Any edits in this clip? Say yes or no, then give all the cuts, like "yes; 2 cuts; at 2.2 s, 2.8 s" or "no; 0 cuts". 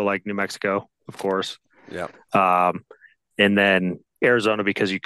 no; 0 cuts